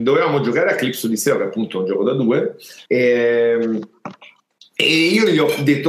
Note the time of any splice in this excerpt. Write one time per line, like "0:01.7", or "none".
0:02.9